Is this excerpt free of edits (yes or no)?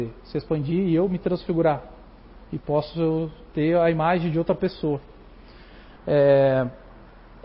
no